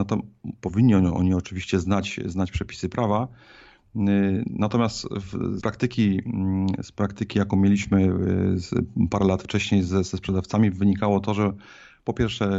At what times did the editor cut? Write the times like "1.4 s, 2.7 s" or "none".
5.6 s